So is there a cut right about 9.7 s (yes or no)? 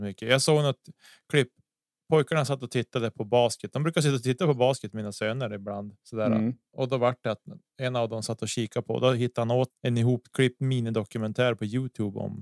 yes